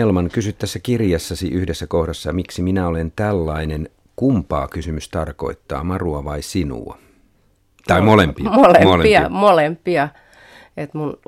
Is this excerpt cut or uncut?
uncut